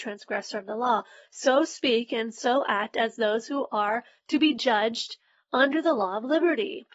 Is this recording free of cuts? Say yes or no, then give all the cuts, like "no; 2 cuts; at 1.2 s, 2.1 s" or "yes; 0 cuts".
yes; 0 cuts